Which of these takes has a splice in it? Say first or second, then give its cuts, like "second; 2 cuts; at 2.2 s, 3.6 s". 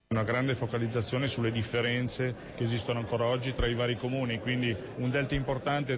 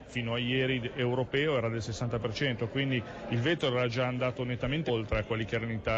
second; 1 cut; at 4.9 s